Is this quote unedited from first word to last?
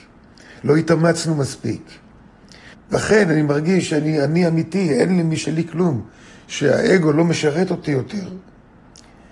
no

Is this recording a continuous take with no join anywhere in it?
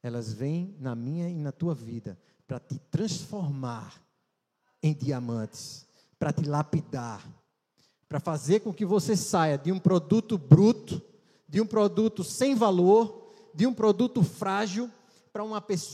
yes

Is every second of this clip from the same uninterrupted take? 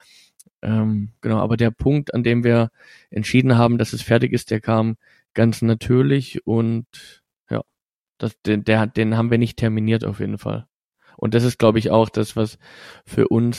yes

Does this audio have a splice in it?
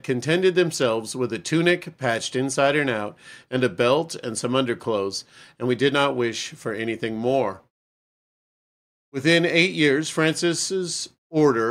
no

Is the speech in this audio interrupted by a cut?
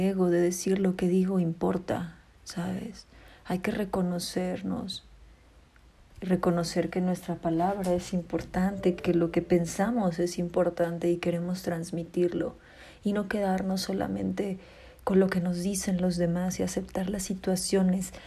yes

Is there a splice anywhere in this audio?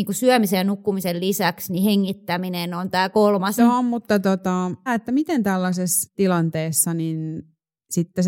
yes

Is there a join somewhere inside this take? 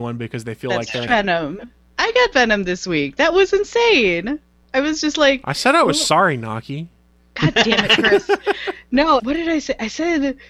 yes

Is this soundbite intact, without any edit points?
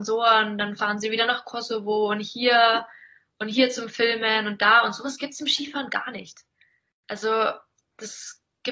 yes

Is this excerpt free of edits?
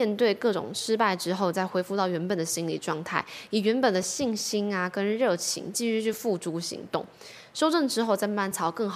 yes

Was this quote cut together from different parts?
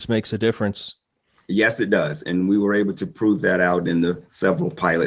no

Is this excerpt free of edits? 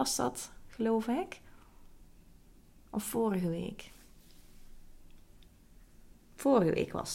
yes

